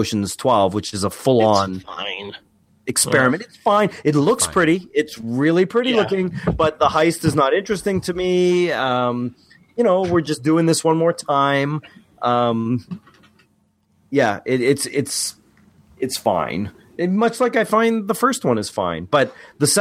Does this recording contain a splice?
no; 0 cuts

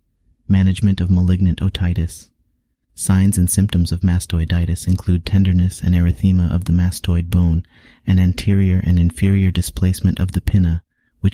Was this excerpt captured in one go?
no; 1 cut; at 2.7 s

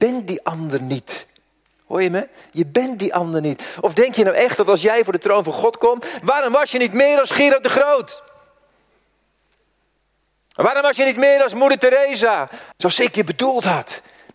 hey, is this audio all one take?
no; 2 cuts; at 6.2 s, 12.7 s

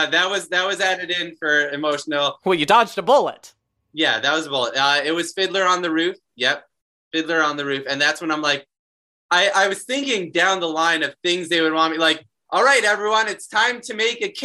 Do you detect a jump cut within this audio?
no; 0 cuts

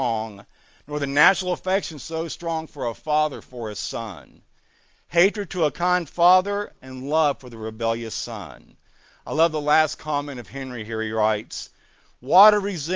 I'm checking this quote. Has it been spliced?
no; 0 cuts

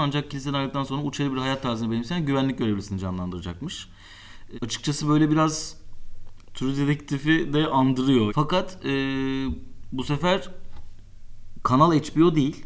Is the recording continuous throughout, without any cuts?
no; 2 cuts; at 4.5 s, 8.3 s

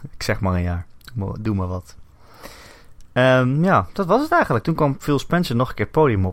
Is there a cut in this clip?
no; 0 cuts

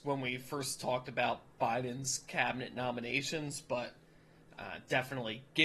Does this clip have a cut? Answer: no; 0 cuts

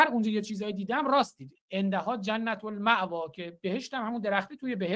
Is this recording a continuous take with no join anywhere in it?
no; 1 cut; at 1.6 s

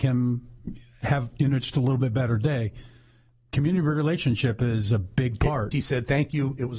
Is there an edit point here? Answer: yes; 1 cut; at 5.7 s

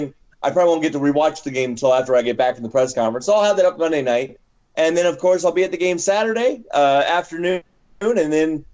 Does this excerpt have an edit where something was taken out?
no; 0 cuts

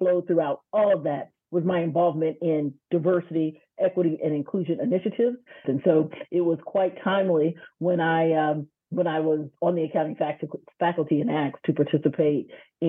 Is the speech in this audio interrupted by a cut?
yes; 1 cut; at 5.6 s

